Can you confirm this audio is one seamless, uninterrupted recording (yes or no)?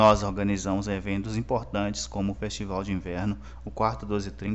no